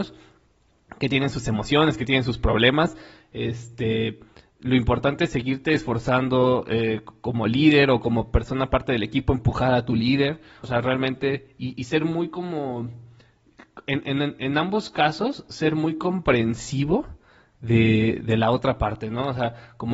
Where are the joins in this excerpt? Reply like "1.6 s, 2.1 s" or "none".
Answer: 10.6 s